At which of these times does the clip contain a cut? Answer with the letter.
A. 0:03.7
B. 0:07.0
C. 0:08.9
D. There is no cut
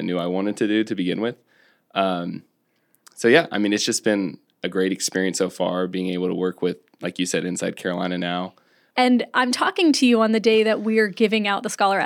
C